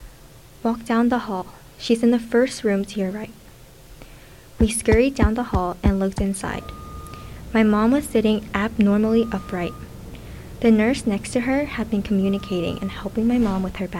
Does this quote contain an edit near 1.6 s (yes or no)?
no